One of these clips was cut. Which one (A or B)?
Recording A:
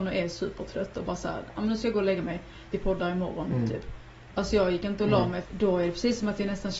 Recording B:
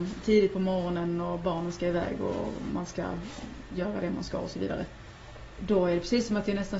A